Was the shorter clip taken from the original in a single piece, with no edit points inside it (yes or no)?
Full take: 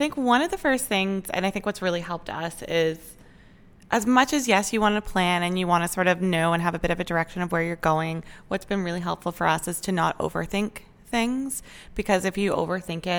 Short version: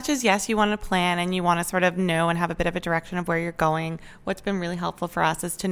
yes